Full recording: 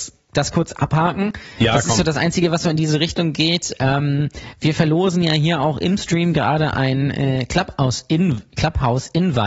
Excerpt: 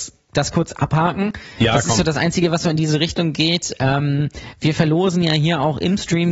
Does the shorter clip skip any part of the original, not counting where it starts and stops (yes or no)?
no